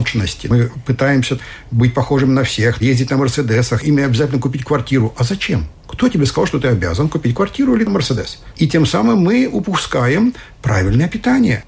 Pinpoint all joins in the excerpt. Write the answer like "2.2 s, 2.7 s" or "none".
none